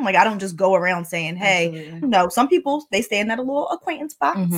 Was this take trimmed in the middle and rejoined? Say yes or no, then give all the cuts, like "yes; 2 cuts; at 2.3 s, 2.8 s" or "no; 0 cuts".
yes; 1 cut; at 2.0 s